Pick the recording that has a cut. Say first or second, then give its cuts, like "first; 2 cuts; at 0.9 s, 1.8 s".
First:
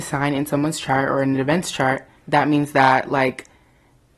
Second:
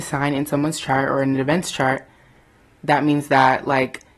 first; 1 cut; at 2.2 s